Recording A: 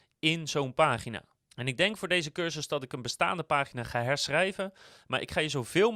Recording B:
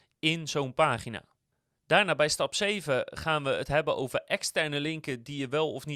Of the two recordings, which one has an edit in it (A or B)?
A